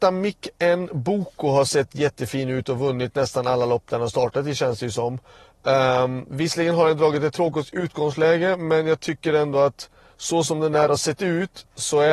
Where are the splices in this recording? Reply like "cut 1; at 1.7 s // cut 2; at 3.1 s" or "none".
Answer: none